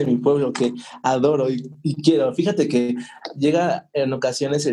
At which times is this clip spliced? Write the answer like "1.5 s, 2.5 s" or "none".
none